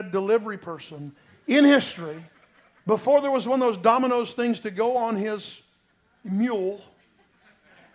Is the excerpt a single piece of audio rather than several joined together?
yes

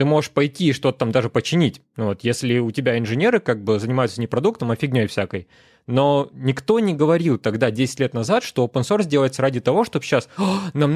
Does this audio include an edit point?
no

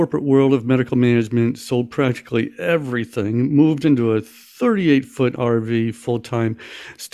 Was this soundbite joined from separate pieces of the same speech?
no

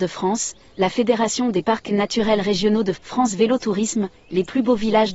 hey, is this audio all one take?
no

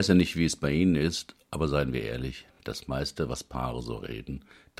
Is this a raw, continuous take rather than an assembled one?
yes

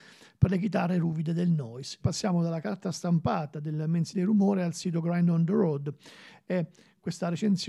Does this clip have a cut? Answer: yes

